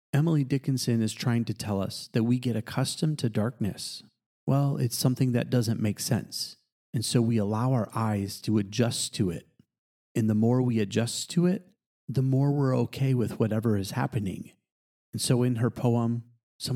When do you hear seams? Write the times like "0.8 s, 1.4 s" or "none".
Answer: 4.3 s